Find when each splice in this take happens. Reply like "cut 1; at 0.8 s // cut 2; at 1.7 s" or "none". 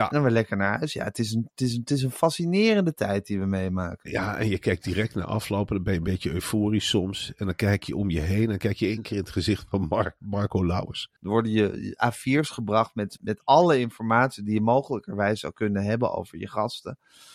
cut 1; at 11.2 s // cut 2; at 13.2 s